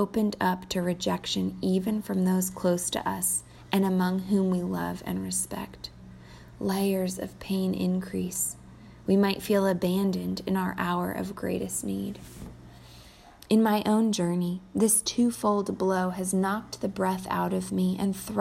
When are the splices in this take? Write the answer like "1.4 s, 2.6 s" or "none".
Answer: none